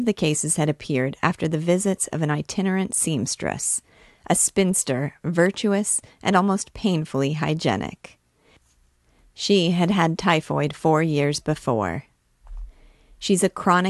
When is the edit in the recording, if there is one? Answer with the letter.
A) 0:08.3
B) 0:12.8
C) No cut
C